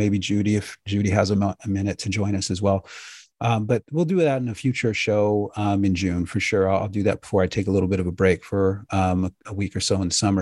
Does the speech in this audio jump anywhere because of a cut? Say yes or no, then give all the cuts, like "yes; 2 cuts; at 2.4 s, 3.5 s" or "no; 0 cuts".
no; 0 cuts